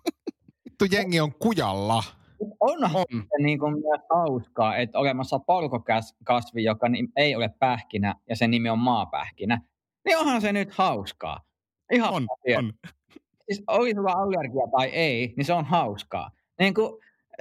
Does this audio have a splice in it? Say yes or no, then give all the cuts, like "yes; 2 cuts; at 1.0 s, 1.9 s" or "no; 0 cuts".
no; 0 cuts